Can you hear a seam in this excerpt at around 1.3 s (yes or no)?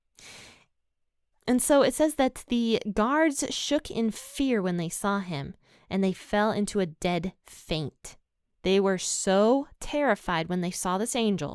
yes